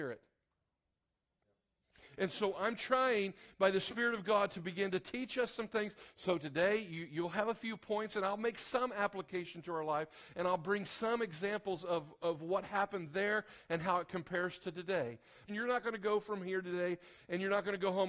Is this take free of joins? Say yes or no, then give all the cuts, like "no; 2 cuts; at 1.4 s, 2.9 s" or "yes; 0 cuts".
no; 2 cuts; at 6.1 s, 15.5 s